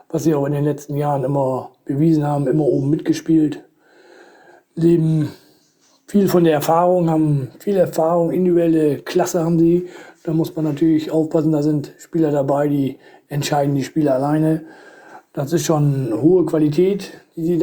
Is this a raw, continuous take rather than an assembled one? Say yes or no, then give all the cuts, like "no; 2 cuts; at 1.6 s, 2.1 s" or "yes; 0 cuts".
yes; 0 cuts